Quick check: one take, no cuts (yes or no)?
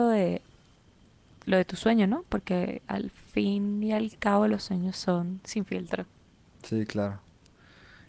yes